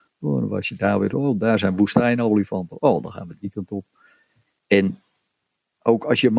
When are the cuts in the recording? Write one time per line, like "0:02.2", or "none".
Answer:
0:01.1